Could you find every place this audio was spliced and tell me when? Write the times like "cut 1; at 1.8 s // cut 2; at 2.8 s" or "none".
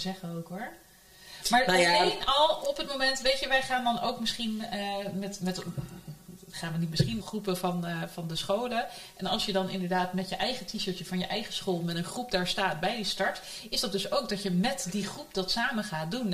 cut 1; at 7.2 s